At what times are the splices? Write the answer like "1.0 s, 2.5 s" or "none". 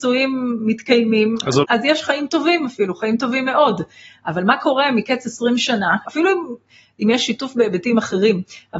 1.6 s, 6.1 s